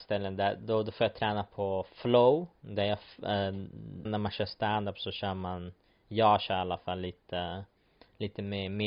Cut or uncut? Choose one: cut